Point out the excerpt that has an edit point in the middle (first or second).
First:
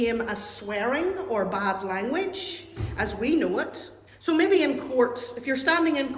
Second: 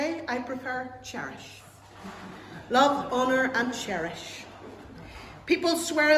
first